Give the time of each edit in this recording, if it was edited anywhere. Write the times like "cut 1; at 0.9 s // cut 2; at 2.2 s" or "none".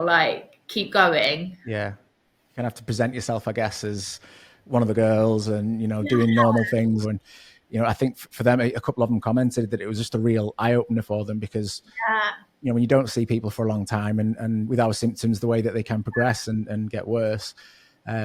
cut 1; at 7.0 s